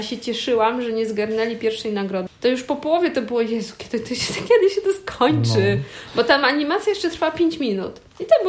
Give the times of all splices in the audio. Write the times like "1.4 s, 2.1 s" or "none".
2.3 s

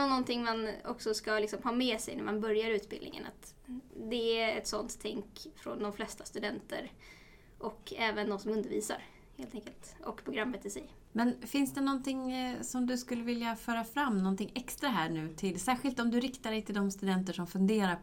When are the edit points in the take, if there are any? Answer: none

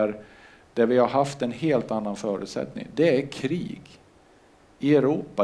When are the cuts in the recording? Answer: none

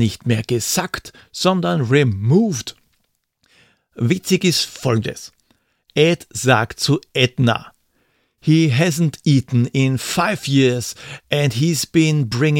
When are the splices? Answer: none

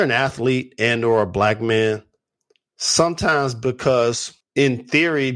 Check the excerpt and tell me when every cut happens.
none

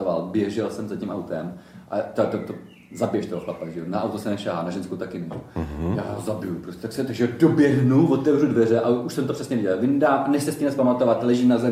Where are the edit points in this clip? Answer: none

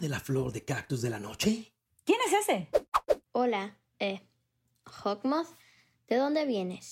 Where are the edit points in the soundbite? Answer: 3.2 s

